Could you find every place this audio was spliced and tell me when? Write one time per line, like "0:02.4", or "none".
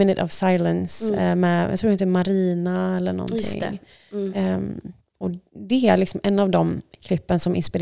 0:05.2